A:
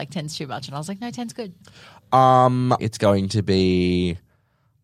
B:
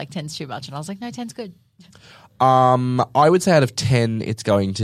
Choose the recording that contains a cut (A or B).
A